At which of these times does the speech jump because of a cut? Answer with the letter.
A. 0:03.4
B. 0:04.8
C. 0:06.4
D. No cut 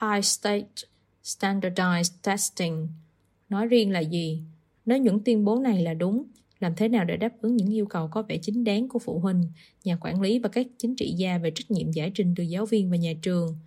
B